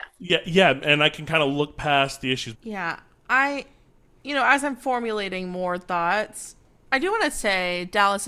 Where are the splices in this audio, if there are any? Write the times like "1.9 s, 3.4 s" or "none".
2.5 s

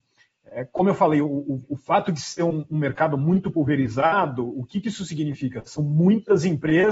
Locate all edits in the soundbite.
none

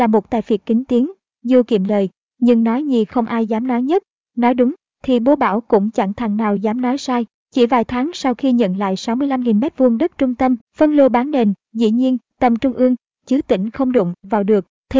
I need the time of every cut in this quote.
10.6 s, 12.3 s

